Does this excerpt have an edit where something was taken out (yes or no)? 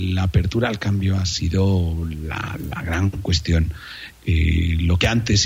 yes